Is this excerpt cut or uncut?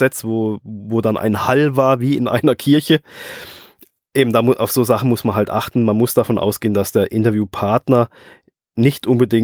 uncut